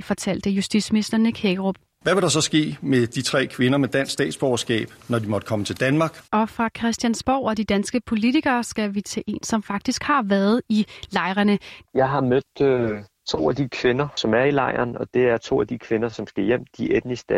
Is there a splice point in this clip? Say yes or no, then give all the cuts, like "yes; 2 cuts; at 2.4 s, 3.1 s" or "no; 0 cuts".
yes; 2 cuts; at 6.2 s, 11.8 s